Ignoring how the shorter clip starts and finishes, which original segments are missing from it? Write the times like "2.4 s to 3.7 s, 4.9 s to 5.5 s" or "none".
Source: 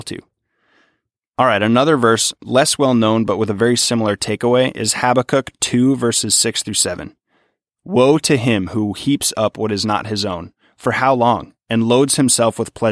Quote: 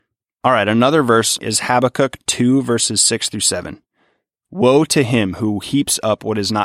2.3 s to 4.7 s